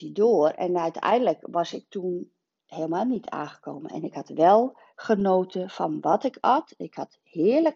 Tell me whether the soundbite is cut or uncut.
uncut